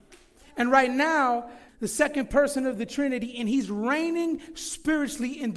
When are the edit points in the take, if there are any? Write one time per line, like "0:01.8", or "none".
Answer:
0:01.7